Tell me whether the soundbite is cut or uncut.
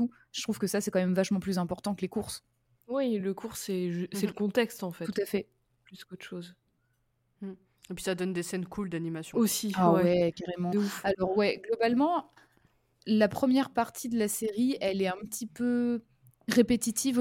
uncut